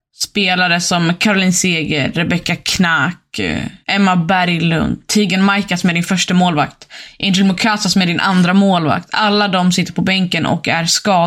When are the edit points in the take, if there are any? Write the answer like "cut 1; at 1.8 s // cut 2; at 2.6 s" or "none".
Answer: cut 1; at 3.8 s